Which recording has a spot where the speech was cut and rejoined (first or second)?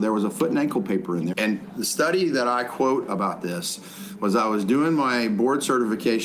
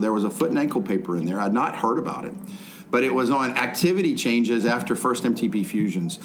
first